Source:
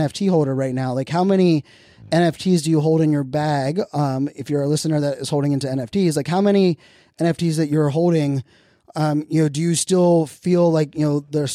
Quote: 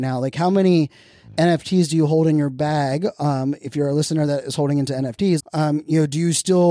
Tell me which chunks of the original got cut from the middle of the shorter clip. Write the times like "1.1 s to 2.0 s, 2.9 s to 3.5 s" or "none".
6.1 s to 8.8 s